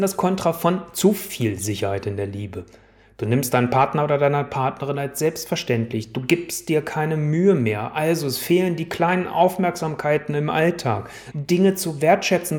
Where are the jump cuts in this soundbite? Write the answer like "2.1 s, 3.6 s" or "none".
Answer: 11.3 s